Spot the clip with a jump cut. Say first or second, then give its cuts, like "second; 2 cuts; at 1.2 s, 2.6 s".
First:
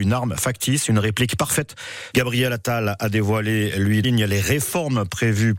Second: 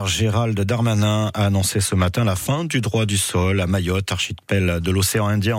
first; 2 cuts; at 2.1 s, 4.0 s